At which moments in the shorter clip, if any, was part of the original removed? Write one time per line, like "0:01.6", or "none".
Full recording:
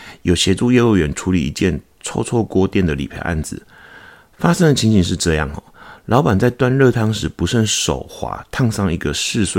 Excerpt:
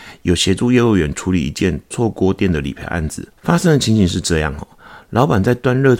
0:01.9
0:03.3